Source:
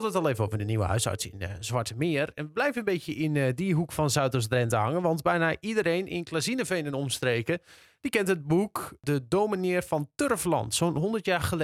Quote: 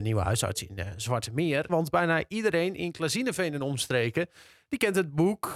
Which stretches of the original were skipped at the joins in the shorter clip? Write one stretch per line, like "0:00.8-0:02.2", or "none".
0:02.3-0:05.0

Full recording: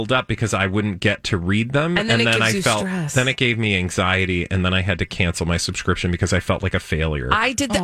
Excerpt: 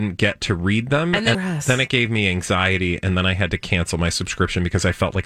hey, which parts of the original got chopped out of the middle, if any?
0:02.2-0:02.8

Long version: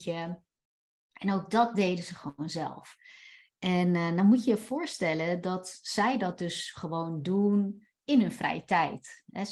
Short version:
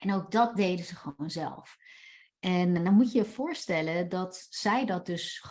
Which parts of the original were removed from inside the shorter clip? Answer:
0:04.0-0:04.1

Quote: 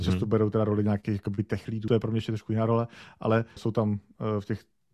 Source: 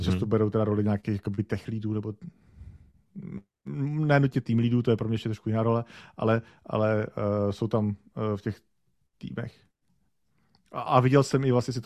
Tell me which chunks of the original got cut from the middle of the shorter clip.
0:01.9-0:04.8
0:06.5-0:07.5

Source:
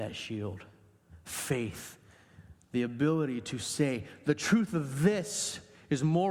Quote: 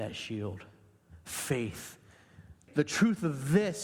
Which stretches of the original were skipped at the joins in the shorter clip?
0:02.7-0:04.2

